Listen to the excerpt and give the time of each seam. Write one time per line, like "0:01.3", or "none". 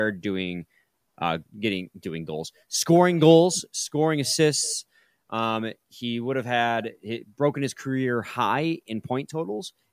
0:01.5